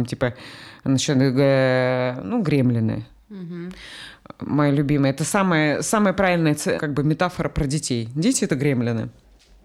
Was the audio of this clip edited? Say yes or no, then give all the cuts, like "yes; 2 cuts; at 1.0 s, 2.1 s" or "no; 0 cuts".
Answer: yes; 1 cut; at 6.8 s